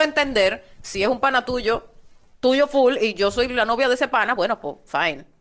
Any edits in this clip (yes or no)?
no